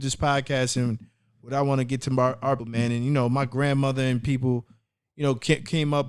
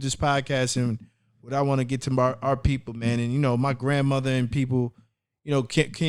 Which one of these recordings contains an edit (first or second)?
first